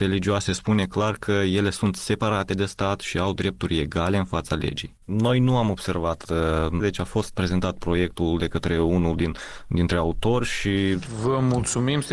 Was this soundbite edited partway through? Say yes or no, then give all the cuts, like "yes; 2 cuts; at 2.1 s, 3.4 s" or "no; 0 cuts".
yes; 2 cuts; at 5.0 s, 6.8 s